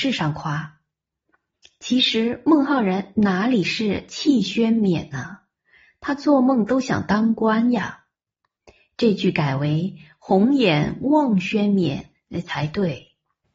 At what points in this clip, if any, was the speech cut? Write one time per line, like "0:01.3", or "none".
none